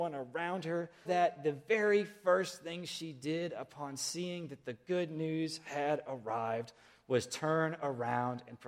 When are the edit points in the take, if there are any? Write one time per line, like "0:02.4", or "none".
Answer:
0:01.0